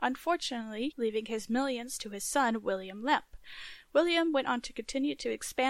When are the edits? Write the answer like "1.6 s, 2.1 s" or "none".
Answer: 0.9 s